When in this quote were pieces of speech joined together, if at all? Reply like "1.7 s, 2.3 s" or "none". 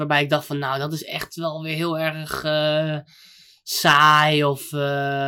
none